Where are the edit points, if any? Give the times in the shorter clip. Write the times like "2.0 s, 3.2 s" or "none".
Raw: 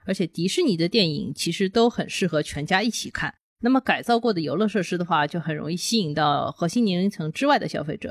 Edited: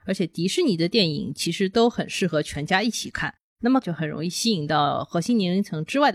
3.8 s

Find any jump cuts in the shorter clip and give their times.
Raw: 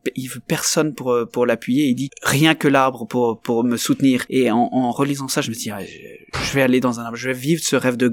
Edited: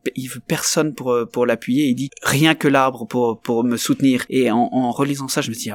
none

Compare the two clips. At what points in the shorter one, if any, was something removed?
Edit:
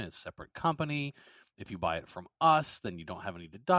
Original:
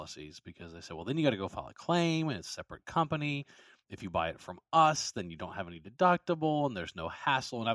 none

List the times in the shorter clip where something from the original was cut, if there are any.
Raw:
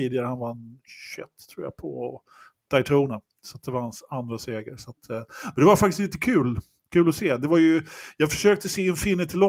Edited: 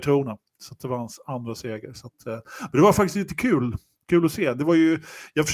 none

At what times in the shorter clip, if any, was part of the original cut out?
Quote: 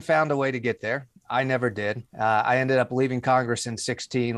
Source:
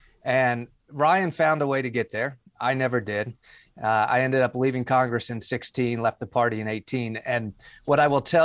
2.1 s

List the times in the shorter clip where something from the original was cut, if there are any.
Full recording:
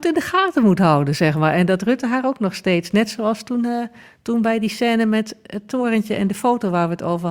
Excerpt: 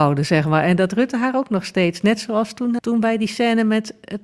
2.8 s

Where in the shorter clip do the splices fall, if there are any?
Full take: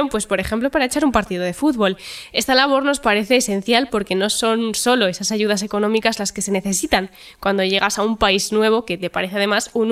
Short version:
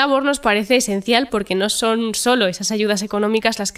none

